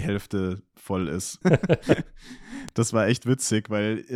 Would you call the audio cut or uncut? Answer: cut